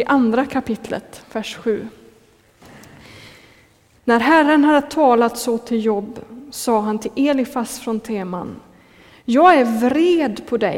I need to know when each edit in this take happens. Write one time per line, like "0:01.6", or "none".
0:04.0